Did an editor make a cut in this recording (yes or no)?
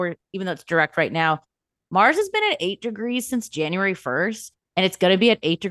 no